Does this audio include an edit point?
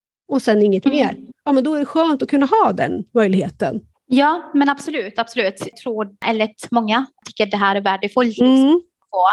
no; 0 cuts

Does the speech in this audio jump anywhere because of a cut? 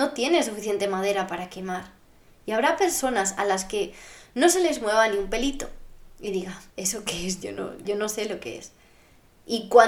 yes; 2 cuts; at 6.7 s, 7.8 s

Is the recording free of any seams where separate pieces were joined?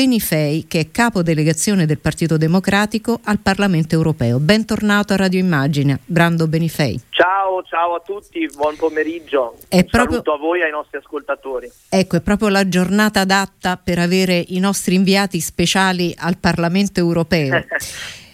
yes; 0 cuts

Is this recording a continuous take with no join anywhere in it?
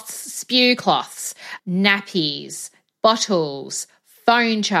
no; 2 cuts; at 1.6 s, 2.9 s

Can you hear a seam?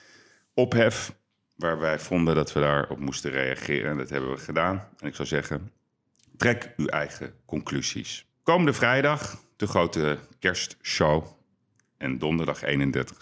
yes; 1 cut; at 8.3 s

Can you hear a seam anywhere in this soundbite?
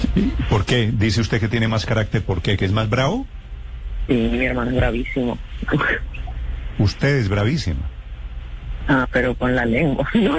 yes; 1 cut; at 9.0 s

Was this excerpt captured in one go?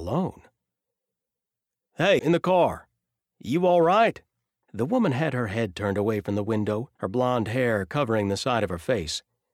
no; 3 cuts; at 2.2 s, 4.6 s, 7.0 s

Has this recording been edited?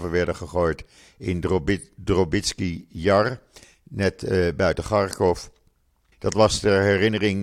yes; 1 cut; at 6.1 s

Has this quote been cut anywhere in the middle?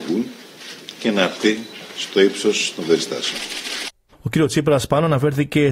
yes; 1 cut; at 4.1 s

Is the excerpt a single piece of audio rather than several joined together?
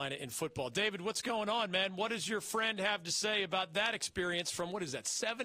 yes; 0 cuts

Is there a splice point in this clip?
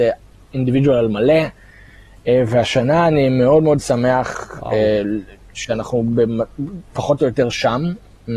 no; 0 cuts

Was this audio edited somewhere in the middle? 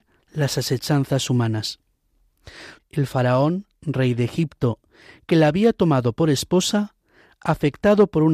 yes; 1 cut; at 2.8 s

